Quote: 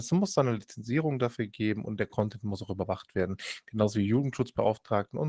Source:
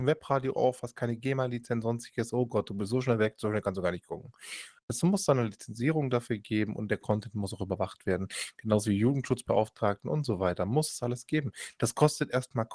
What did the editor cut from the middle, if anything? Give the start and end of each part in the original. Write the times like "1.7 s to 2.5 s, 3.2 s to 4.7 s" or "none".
none